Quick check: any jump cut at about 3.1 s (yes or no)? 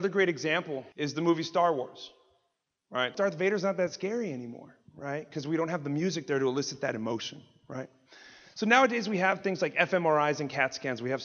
yes